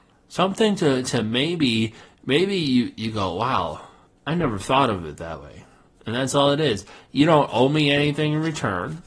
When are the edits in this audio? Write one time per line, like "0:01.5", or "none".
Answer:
none